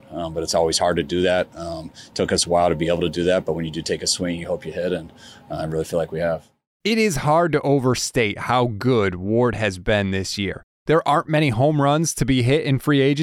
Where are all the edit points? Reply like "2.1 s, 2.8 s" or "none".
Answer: 10.7 s

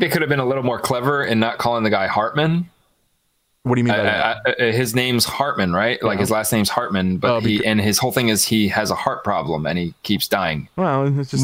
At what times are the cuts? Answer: none

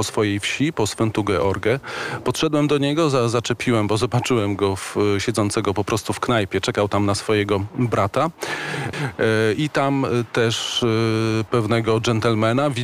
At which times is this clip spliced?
8.9 s, 11.5 s

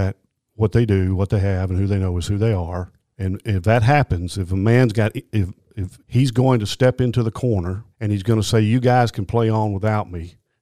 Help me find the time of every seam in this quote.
6.0 s, 7.9 s

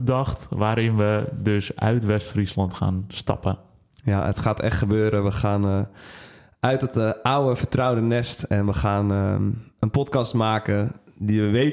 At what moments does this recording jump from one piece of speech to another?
none

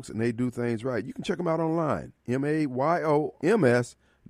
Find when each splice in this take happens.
3.4 s

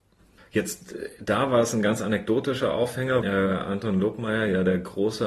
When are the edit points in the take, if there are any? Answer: 3.2 s

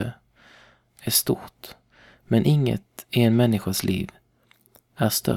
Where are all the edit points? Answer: none

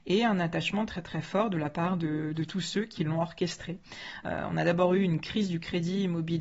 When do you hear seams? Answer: none

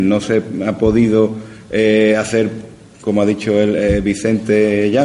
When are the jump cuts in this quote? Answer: none

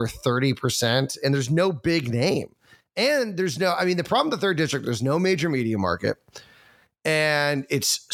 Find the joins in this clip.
none

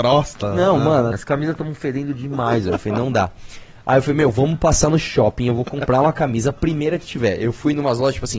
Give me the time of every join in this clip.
1.1 s

